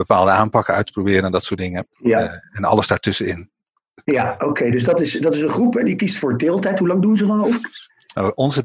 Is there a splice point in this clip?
yes; 2 cuts; at 1.9 s, 7.2 s

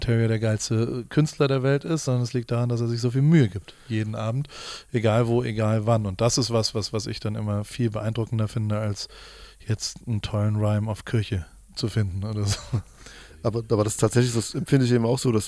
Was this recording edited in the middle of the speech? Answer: no; 0 cuts

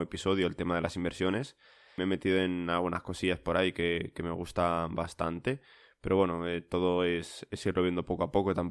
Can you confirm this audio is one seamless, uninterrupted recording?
yes; 0 cuts

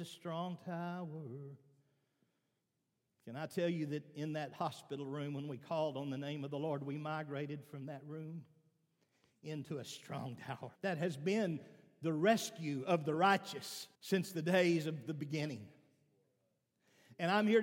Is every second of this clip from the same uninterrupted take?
no; 2 cuts; at 10.8 s, 13.9 s

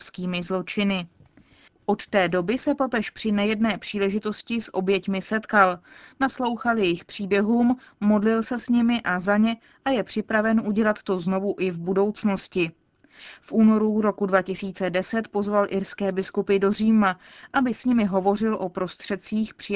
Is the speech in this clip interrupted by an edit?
no; 0 cuts

